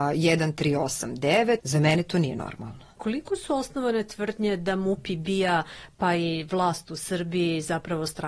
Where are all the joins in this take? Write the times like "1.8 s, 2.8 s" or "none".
1.6 s

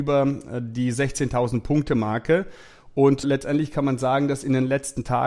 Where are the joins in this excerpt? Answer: 3.2 s

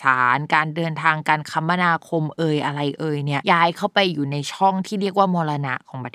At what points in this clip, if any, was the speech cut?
3.4 s

